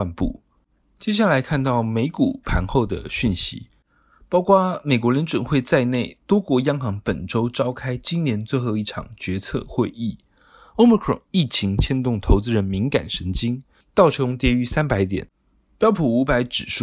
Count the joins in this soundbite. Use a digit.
1